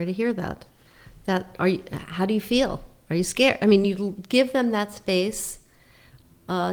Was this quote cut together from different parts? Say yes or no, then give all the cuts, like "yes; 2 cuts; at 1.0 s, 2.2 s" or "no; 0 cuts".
no; 0 cuts